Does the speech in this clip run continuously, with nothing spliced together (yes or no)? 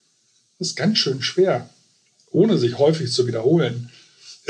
yes